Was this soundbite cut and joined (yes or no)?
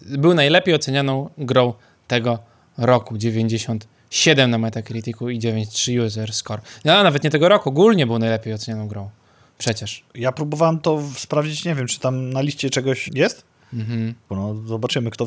yes